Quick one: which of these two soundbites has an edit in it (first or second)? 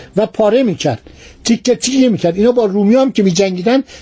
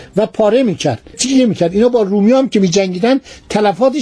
second